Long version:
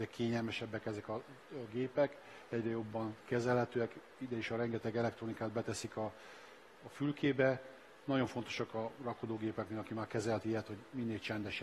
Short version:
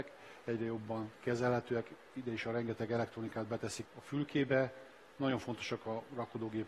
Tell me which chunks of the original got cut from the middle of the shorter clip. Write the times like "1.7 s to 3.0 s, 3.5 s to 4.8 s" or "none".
5.9 s to 6.7 s